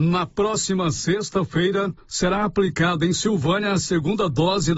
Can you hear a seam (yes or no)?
yes